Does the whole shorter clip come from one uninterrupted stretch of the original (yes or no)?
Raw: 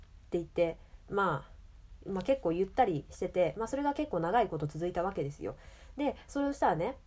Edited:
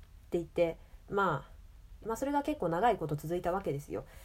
no